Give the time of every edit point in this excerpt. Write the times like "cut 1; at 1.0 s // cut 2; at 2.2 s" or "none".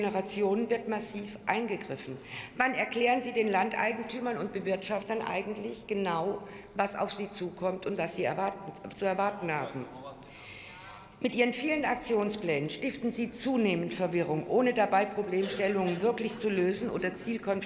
none